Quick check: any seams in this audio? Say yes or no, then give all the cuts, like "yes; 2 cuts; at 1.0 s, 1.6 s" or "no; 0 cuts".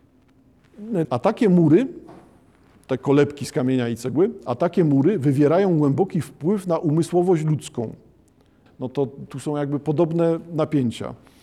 yes; 2 cuts; at 1.0 s, 8.7 s